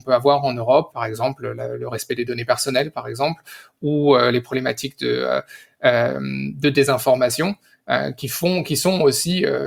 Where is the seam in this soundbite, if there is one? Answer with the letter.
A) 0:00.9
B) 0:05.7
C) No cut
A